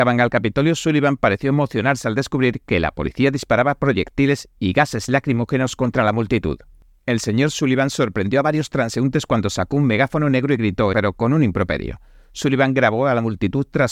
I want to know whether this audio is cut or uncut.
cut